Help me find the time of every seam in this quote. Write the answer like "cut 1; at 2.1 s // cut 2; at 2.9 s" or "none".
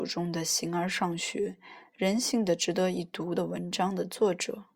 cut 1; at 1.8 s